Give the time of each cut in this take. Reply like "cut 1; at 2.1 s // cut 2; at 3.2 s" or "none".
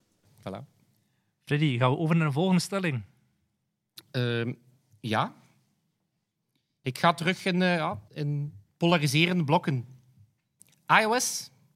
cut 1; at 8.1 s